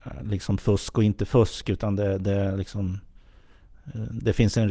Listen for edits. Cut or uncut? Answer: uncut